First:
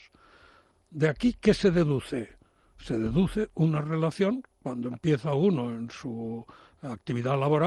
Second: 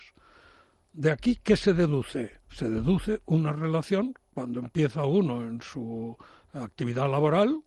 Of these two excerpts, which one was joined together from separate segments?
second; 1 cut; at 2.4 s

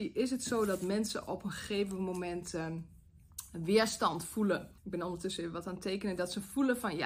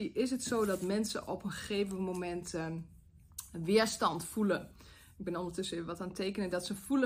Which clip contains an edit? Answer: first; 1 cut; at 4.8 s

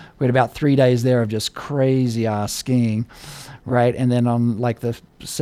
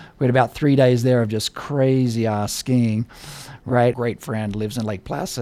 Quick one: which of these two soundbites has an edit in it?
second; 1 cut; at 3.9 s

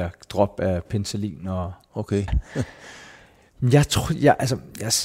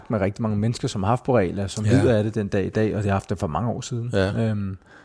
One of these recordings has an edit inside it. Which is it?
first; 1 cut; at 2.3 s

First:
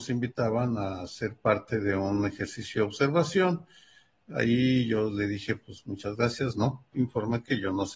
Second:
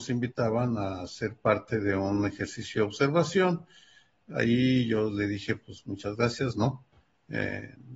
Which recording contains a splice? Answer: first; 1 cut; at 6.9 s

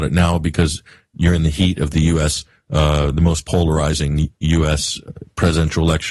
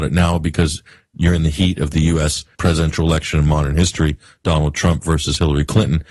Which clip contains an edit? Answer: second; 1 cut; at 2.5 s

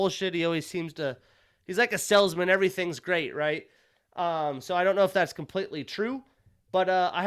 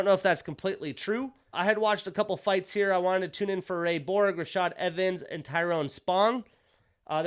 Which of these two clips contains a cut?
second; 1 cut; at 1.5 s

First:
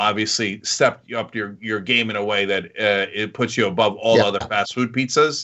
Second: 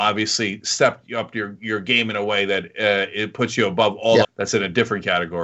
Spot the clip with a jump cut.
second; 1 cut; at 4.2 s

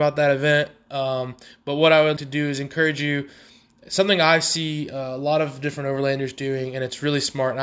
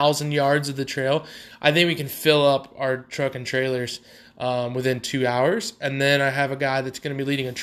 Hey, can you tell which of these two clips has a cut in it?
first; 1 cut; at 2.2 s

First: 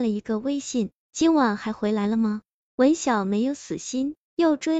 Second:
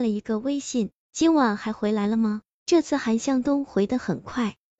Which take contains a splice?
first; 1 cut; at 2.6 s

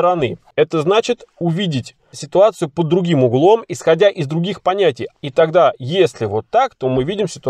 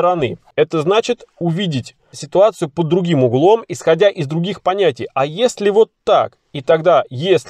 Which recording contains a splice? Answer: first; 1 cut; at 5.1 s

